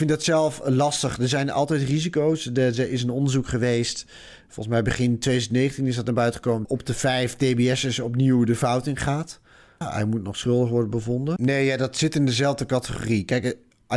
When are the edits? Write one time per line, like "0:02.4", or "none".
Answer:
0:06.6
0:09.8
0:11.4